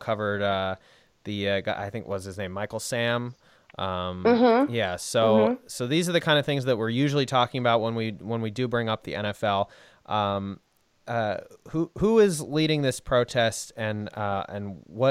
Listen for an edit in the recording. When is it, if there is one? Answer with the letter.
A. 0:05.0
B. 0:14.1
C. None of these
C